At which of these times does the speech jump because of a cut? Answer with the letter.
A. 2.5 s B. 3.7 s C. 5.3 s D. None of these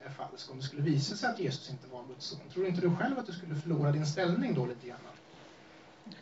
D